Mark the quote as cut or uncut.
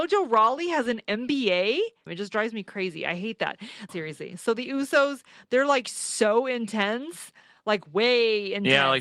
cut